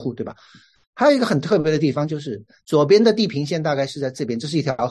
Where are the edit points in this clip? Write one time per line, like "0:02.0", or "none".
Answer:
0:02.6